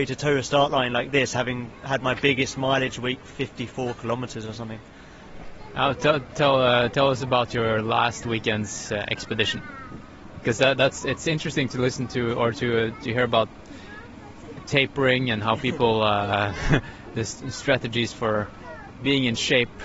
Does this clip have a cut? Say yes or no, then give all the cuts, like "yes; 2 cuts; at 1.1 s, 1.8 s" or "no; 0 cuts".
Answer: no; 0 cuts